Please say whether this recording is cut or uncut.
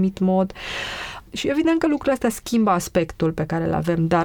uncut